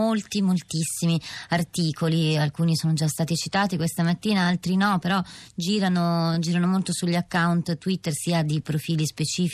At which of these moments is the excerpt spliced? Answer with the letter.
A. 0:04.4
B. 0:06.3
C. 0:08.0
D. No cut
D